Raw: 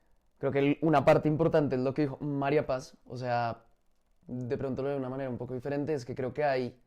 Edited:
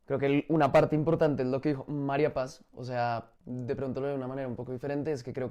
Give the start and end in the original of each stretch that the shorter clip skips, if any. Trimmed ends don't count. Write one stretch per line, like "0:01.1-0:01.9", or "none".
0:03.7-0:04.2